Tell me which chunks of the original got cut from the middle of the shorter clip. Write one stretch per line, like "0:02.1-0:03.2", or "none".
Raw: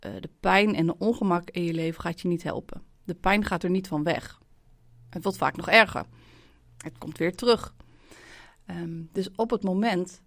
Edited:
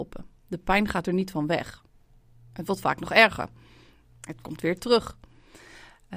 none